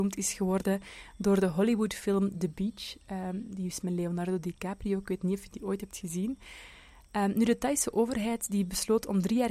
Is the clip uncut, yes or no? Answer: yes